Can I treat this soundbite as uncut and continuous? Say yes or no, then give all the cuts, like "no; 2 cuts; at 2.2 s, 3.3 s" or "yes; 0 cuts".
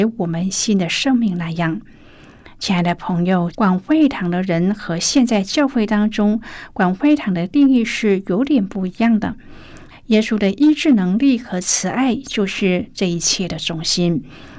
no; 2 cuts; at 3.5 s, 9.9 s